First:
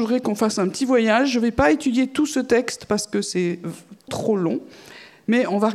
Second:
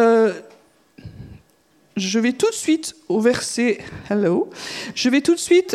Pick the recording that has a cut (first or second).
first